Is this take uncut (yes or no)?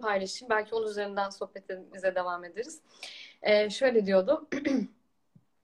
yes